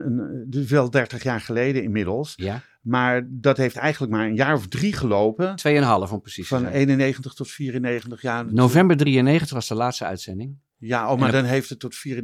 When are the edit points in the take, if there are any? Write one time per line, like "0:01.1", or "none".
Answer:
none